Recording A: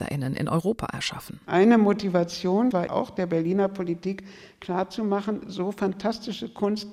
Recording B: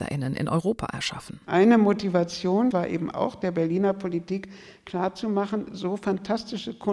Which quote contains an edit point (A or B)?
A